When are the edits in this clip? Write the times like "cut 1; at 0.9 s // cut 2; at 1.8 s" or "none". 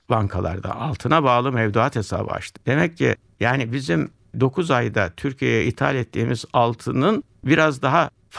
cut 1; at 2.6 s